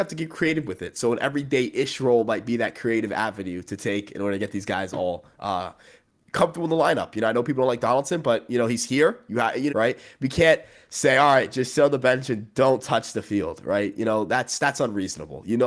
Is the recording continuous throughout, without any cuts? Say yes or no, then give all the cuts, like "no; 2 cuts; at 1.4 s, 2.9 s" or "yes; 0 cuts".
no; 1 cut; at 9.7 s